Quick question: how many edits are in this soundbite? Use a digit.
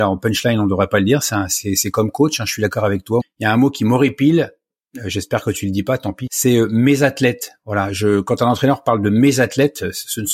2